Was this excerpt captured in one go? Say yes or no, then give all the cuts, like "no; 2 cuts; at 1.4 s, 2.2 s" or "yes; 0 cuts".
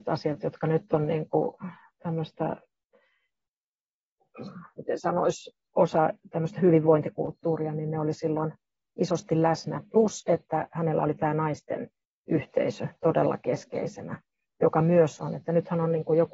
yes; 0 cuts